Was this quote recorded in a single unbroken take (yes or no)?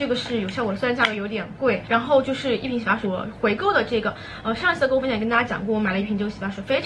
no